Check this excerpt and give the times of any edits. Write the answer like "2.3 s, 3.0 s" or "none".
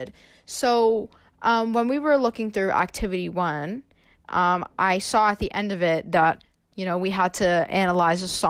none